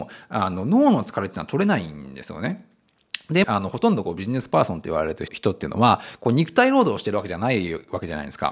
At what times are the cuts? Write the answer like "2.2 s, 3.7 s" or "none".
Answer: 3.4 s, 5.3 s